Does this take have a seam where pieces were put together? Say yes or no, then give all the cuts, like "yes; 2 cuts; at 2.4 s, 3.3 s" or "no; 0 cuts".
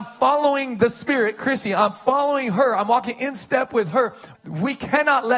yes; 1 cut; at 4.3 s